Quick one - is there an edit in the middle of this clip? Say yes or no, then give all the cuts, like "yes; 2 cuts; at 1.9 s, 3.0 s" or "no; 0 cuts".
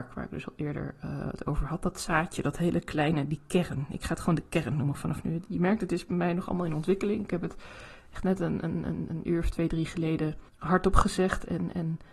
yes; 1 cut; at 10.5 s